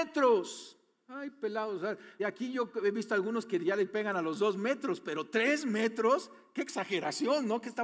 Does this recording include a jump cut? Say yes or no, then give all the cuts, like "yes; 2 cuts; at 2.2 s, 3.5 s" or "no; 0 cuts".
yes; 1 cut; at 2.2 s